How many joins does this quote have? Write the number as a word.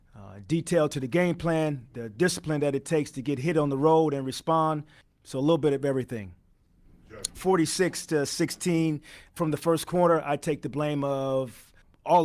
one